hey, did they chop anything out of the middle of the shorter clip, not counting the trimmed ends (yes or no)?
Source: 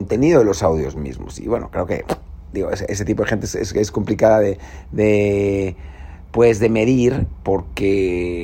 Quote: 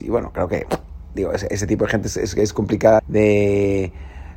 yes